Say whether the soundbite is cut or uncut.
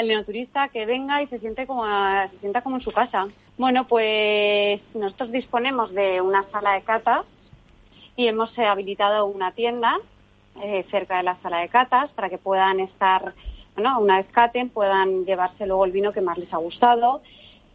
cut